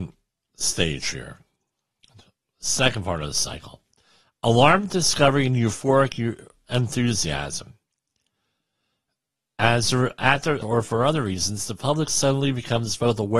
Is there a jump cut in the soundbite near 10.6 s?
yes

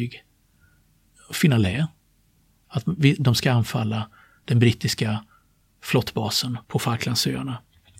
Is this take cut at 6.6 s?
yes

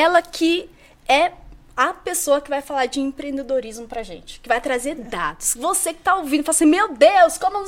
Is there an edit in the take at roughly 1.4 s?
no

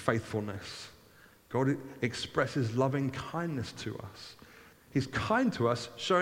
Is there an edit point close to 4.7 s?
yes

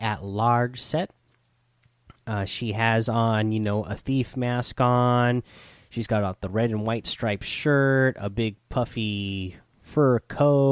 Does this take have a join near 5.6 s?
no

